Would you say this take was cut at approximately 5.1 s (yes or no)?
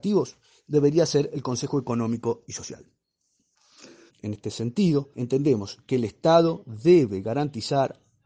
yes